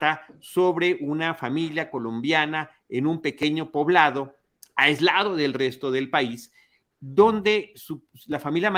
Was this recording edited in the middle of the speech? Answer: no; 0 cuts

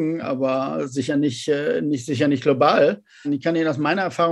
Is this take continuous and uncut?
no; 1 cut; at 3.2 s

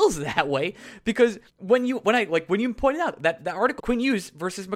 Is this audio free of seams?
no; 2 cuts; at 1.5 s, 3.8 s

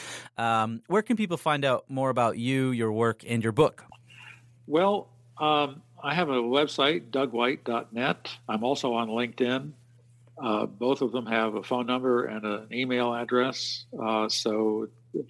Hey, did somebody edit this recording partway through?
no; 0 cuts

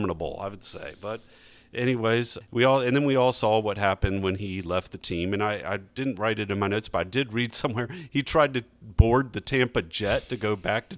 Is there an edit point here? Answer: no; 0 cuts

